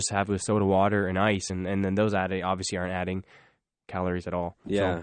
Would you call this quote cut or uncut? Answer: uncut